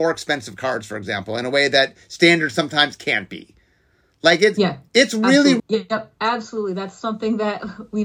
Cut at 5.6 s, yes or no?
yes